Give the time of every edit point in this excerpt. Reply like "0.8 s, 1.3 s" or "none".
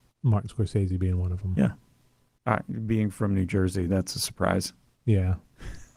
2.4 s